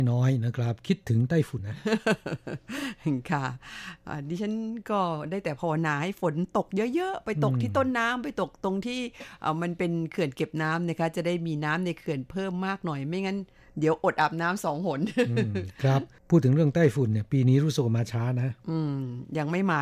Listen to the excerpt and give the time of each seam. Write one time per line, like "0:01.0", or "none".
0:01.6